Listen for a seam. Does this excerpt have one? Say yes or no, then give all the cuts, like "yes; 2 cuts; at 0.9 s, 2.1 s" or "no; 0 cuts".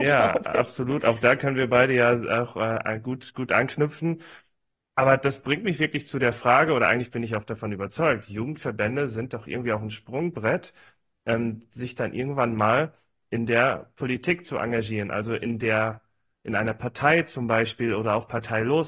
no; 0 cuts